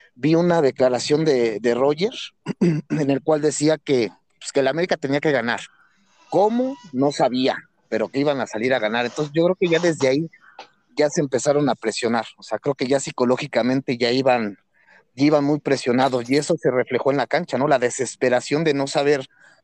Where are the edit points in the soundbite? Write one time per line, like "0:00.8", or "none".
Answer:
none